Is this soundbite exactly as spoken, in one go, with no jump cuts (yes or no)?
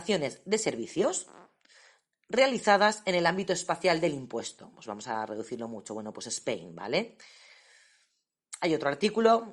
yes